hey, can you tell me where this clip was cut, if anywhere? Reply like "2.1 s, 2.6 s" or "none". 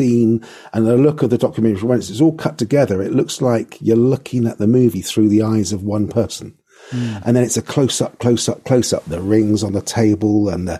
7.2 s